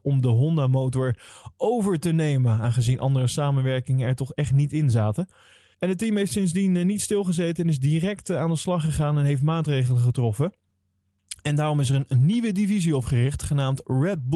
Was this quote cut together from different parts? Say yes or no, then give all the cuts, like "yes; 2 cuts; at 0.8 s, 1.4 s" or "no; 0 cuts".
yes; 1 cut; at 5.7 s